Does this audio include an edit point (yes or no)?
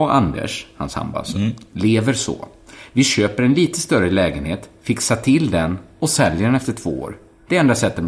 no